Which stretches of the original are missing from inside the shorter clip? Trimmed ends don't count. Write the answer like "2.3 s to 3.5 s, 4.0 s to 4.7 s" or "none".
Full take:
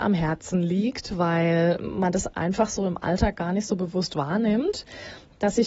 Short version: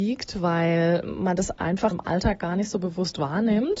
2.7 s to 2.9 s